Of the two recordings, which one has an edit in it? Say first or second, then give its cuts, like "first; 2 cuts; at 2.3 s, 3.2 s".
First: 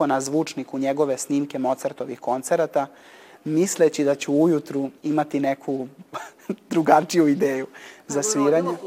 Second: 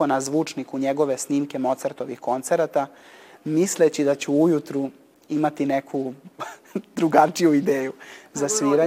first; 1 cut; at 5.0 s